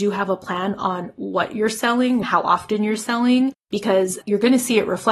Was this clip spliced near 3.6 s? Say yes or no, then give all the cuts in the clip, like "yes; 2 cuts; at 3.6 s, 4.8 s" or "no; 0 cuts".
no; 1 cut; at 2.2 s